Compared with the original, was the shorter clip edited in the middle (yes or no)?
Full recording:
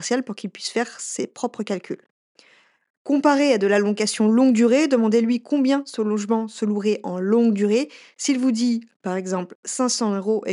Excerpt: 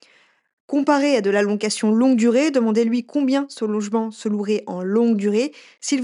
no